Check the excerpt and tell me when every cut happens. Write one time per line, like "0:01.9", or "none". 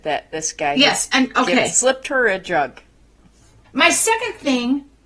0:03.6